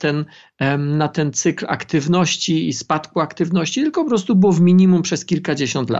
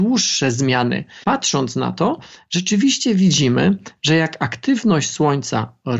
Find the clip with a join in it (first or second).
second